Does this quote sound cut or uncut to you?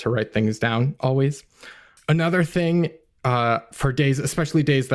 uncut